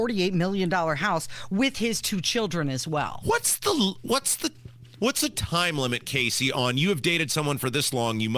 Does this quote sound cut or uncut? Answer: uncut